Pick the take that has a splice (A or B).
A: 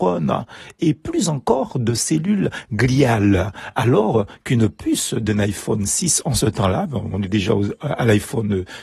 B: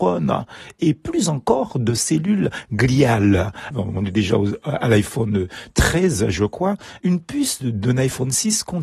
B